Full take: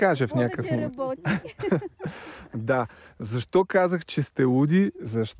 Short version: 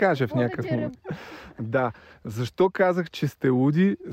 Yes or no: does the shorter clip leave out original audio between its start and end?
yes